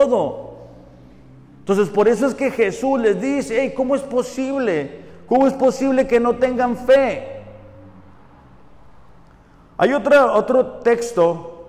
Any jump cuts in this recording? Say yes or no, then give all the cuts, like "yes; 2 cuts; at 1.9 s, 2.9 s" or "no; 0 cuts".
no; 0 cuts